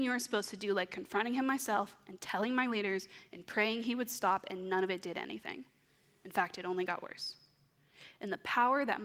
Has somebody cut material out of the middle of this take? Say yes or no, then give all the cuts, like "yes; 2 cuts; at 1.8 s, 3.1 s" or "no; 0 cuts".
no; 0 cuts